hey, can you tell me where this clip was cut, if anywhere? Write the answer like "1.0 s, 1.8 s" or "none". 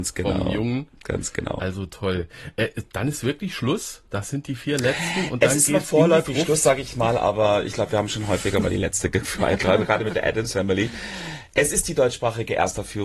none